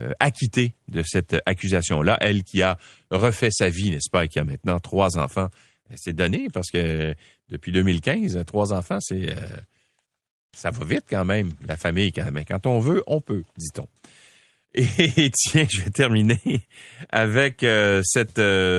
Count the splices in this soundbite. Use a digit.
0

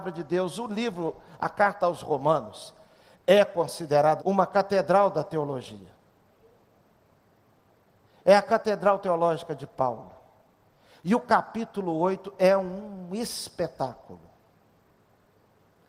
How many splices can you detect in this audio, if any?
1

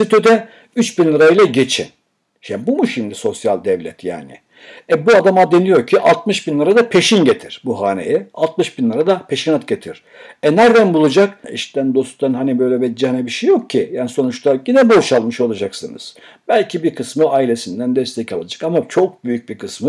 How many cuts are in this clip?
1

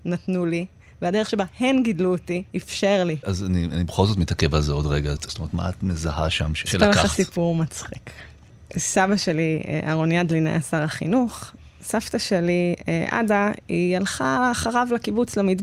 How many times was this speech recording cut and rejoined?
2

